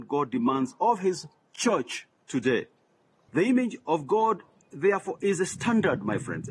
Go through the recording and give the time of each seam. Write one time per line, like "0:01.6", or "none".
0:03.3

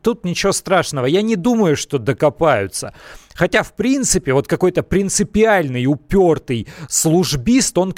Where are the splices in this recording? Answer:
none

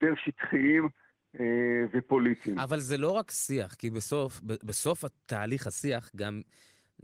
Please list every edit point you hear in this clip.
none

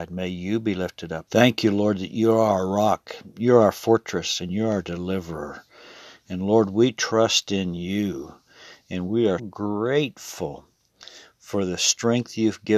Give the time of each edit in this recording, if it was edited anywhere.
0:01.3
0:09.4

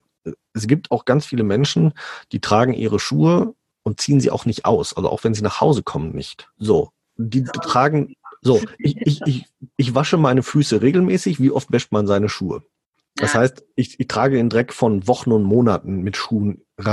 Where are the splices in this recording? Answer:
0:06.6

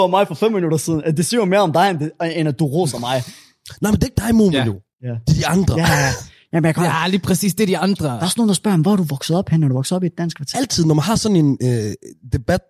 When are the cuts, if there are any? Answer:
0:10.5

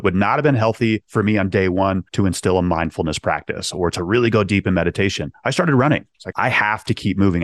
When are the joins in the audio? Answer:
0:02.1
0:06.3

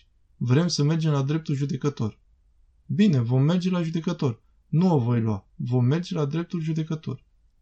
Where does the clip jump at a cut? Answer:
none

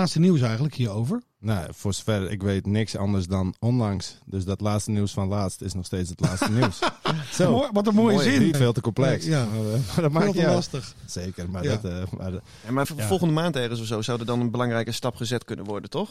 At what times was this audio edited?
0:01.2
0:08.5
0:12.8

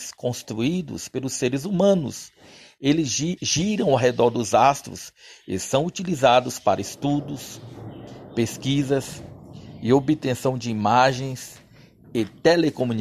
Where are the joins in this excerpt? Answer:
0:03.4

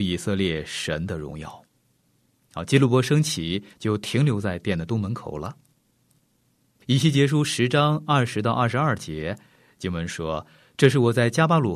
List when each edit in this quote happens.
0:03.7
0:06.8

